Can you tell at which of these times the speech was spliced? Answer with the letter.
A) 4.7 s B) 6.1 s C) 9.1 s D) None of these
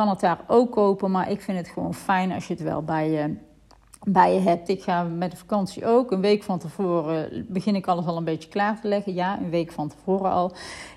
A